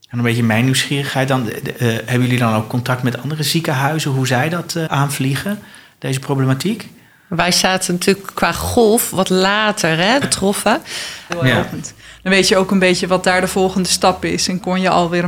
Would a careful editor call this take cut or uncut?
cut